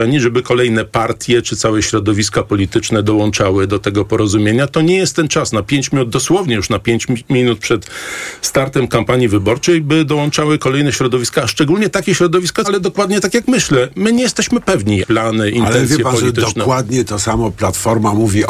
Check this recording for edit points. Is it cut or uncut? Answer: cut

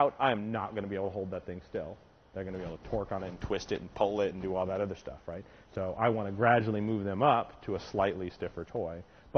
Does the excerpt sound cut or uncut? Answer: uncut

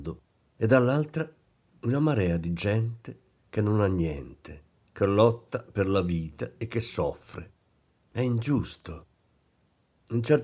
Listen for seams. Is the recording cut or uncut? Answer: uncut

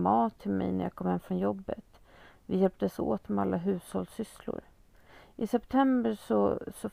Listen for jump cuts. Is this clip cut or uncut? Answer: uncut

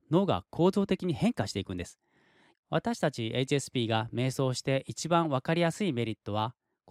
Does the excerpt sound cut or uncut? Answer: cut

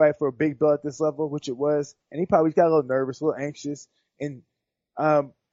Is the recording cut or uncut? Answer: uncut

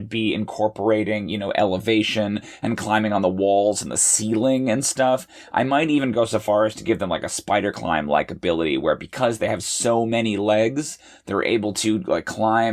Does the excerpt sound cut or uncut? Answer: uncut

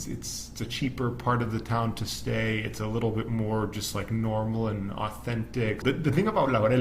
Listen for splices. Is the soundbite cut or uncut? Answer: cut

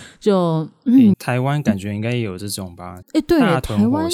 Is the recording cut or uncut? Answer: cut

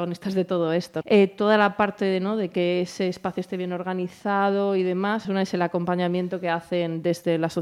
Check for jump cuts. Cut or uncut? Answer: cut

